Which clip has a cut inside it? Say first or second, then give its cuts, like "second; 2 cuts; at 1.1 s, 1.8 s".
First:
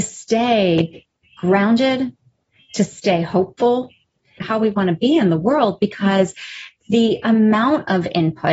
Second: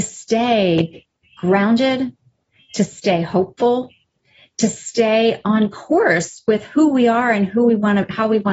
first; 1 cut; at 4.4 s